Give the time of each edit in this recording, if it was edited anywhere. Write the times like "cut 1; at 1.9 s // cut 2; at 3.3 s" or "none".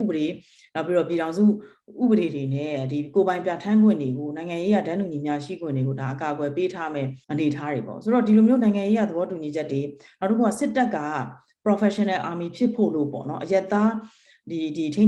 cut 1; at 7.2 s